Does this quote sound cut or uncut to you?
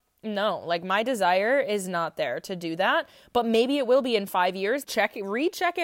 cut